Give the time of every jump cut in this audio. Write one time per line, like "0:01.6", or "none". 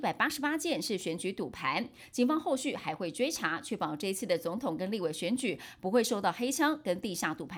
none

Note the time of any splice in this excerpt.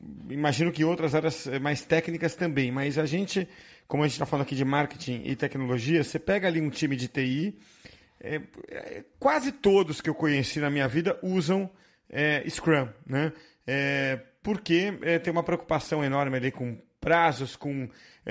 none

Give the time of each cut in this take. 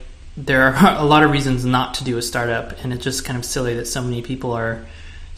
none

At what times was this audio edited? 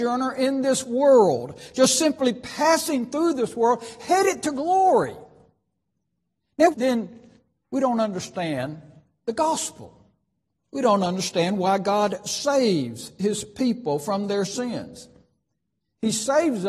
0:06.7

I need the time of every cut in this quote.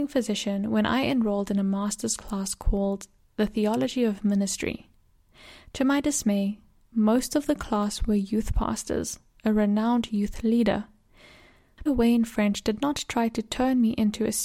0:09.4
0:11.9

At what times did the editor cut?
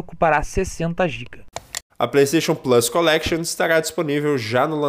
0:01.9

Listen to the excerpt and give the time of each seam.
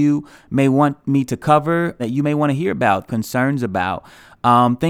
0:02.0
0:03.1

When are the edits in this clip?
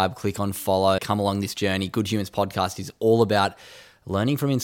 0:01.0

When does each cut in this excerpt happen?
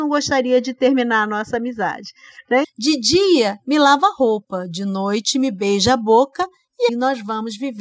0:02.6
0:06.9

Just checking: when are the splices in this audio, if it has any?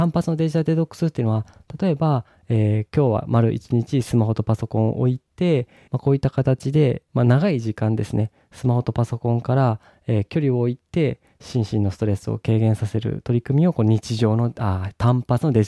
0:05.9
0:07.1

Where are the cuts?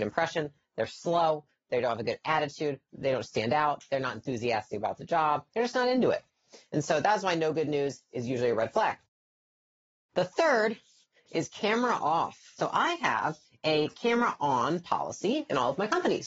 0:05.5

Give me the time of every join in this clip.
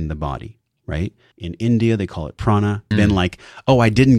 0:01.3
0:02.9

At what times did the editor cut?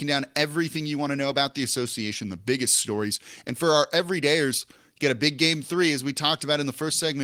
none

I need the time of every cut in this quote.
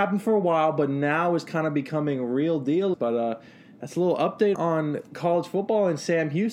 0:02.9
0:04.5

